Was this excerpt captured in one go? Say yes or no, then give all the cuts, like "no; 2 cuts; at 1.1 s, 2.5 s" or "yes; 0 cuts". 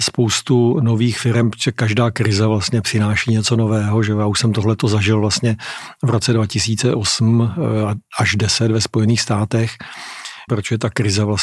no; 1 cut; at 10.5 s